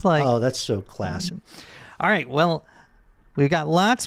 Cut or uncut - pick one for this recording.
cut